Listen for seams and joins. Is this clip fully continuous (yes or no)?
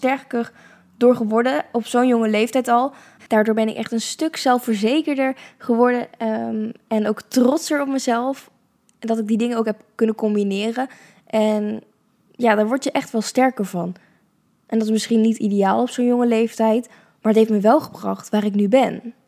no